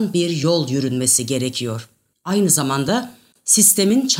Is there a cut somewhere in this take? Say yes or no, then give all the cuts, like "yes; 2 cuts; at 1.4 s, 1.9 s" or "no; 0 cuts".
yes; 1 cut; at 2.1 s